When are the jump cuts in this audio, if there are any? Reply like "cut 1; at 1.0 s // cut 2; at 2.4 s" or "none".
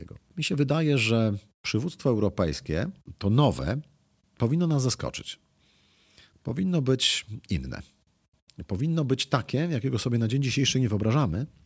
none